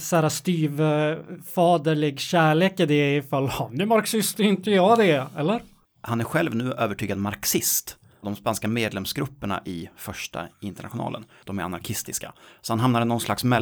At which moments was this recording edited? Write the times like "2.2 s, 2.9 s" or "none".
5.8 s, 8.2 s, 11.4 s